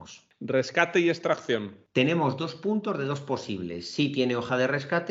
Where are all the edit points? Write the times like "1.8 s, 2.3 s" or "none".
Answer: none